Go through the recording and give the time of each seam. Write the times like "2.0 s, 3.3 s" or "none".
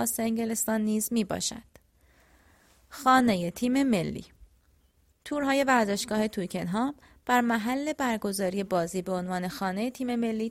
none